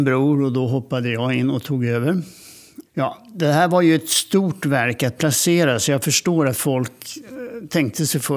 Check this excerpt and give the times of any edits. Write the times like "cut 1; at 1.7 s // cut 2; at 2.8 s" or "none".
cut 1; at 2.9 s